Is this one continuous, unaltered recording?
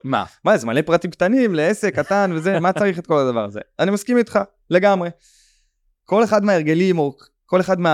yes; 0 cuts

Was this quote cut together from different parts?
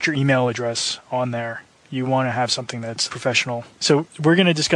no; 0 cuts

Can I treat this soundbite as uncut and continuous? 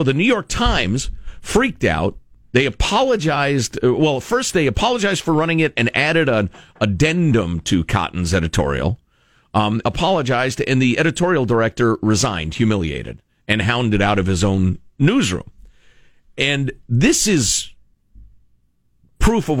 no; 1 cut; at 9.8 s

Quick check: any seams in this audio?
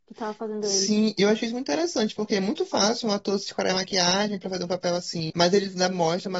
yes; 1 cut; at 5.3 s

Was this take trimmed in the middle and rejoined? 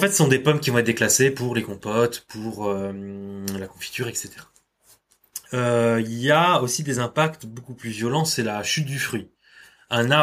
no; 0 cuts

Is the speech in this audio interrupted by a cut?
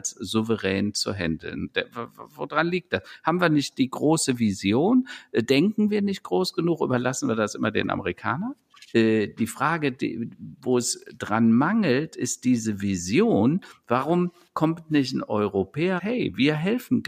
yes; 2 cuts; at 8.9 s, 16.0 s

